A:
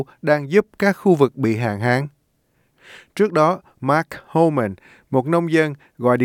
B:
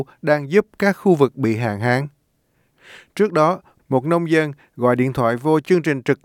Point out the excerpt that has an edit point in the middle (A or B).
B